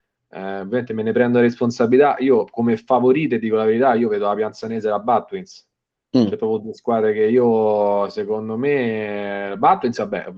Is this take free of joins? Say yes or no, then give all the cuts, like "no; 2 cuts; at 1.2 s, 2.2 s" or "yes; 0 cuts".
yes; 0 cuts